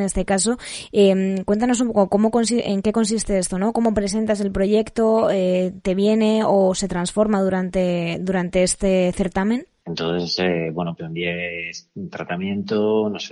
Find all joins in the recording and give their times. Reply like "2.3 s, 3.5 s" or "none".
9.8 s, 11.0 s